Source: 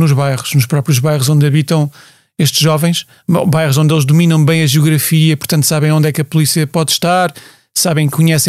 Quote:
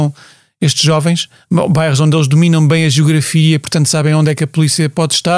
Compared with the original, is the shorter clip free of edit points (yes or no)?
yes